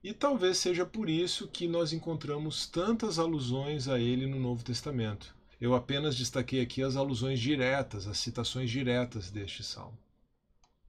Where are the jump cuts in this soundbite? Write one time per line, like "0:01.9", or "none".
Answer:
0:05.5